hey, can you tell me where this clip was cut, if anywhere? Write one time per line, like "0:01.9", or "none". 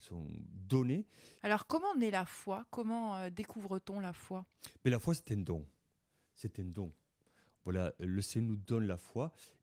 0:01.4